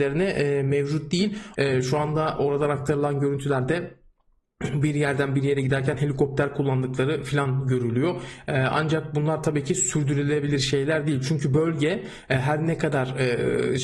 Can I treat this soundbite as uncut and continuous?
no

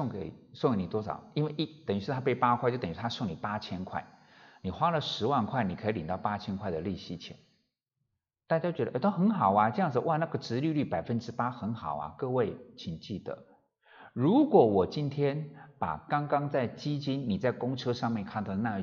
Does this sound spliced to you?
no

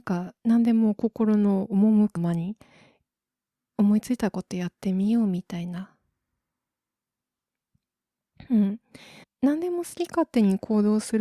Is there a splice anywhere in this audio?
yes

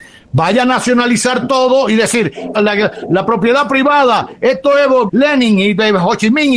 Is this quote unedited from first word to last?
no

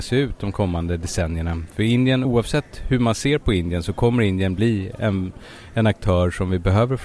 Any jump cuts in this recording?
no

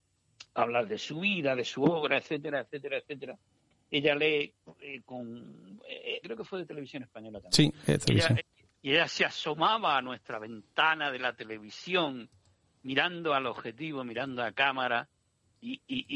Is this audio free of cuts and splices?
no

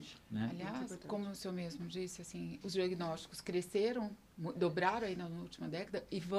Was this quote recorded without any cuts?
no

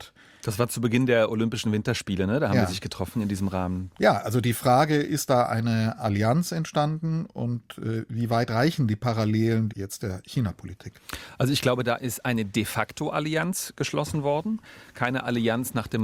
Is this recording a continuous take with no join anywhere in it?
no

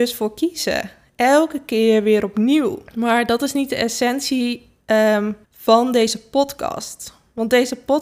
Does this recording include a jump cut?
yes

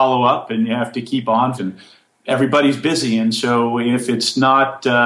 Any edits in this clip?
yes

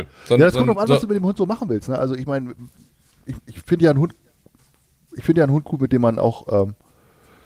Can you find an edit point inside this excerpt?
no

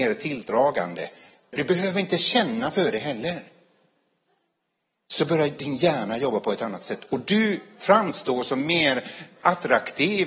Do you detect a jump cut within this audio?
yes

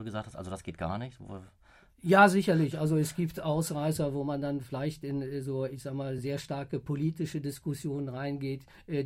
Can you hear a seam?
no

